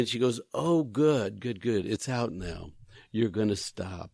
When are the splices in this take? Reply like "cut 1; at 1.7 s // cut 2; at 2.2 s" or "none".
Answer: none